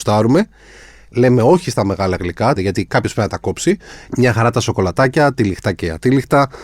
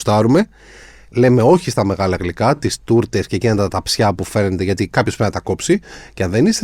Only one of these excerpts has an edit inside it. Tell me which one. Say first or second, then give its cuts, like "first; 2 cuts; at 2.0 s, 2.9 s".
first; 2 cuts; at 2.6 s, 4.1 s